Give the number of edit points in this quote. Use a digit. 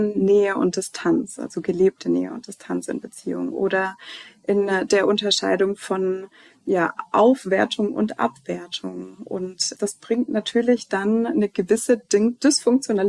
1